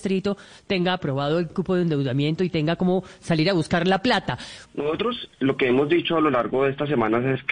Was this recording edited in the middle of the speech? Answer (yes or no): yes